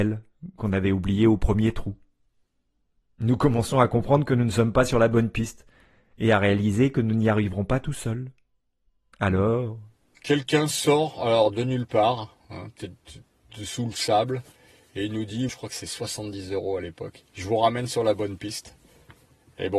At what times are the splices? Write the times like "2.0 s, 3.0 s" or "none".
15.5 s, 17.3 s